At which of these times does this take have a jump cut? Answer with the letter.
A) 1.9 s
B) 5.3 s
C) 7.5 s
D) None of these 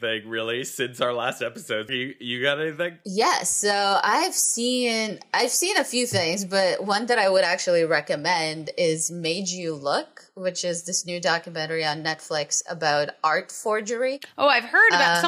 A